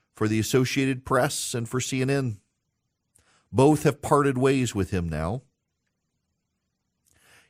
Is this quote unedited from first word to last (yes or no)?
yes